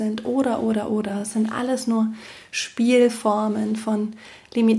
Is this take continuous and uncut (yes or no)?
yes